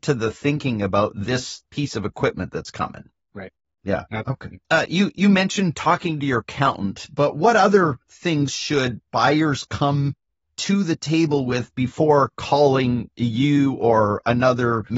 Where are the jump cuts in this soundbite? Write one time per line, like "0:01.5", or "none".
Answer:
none